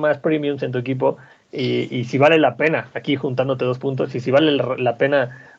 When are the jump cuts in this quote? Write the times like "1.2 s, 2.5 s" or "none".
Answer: none